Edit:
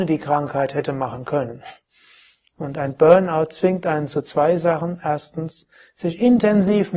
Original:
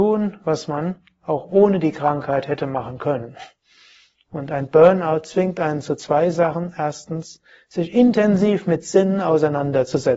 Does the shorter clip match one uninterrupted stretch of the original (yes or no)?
yes